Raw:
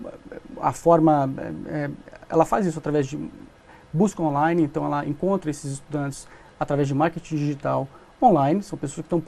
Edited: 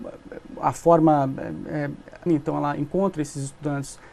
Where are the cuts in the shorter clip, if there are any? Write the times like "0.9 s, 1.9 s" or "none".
2.3 s